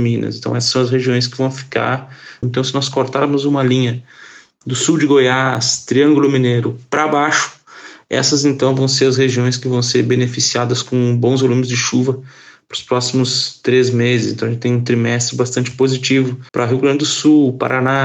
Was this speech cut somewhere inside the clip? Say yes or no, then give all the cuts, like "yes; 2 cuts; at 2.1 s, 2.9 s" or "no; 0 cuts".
yes; 2 cuts; at 2.4 s, 16.5 s